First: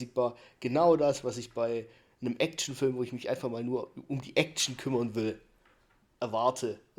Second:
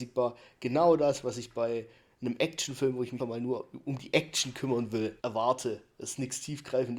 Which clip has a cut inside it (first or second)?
second